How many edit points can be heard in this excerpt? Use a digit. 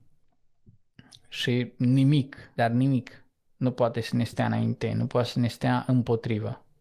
1